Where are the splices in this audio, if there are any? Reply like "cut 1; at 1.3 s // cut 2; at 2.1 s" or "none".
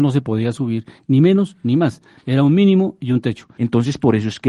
cut 1; at 3.6 s